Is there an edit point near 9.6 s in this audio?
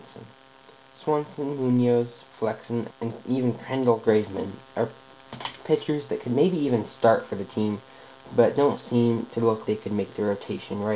yes; 2 cuts; at 2.9 s, 9.6 s

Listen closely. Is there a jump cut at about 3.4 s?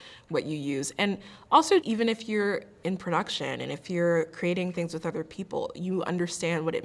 no; 1 cut; at 1.8 s

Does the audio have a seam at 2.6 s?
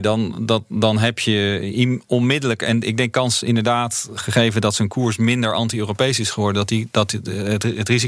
no; 0 cuts

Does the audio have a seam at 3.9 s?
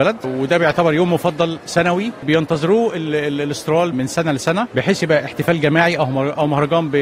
yes; 1 cut; at 3.9 s

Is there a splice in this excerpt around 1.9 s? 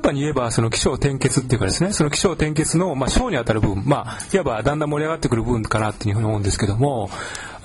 no; 0 cuts

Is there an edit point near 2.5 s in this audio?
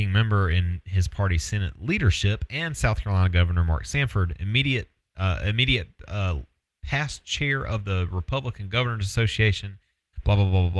no; 0 cuts

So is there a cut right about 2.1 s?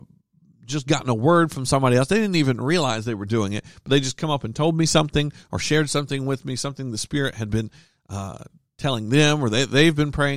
no; 0 cuts

